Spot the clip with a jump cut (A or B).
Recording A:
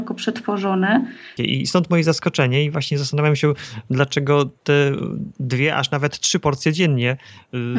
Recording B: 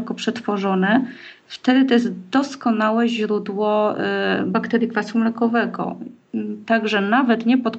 A